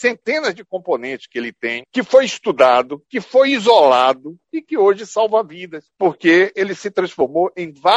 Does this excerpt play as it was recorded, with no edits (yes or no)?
yes